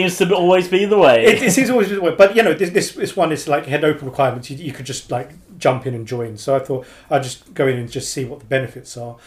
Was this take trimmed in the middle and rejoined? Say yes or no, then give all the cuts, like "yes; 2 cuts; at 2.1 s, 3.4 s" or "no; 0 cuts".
no; 0 cuts